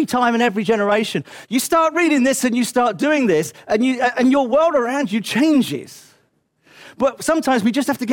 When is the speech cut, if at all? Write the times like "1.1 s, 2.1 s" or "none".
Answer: 1.4 s